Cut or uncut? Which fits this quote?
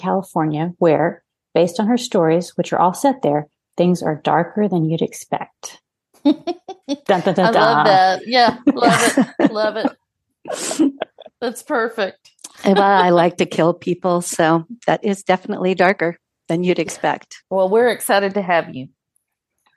cut